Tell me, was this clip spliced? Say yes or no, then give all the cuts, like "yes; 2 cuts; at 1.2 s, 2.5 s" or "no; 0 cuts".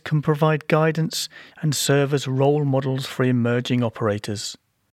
yes; 1 cut; at 1.5 s